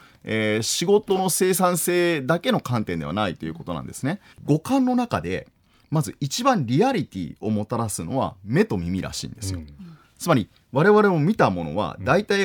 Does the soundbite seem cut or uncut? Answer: cut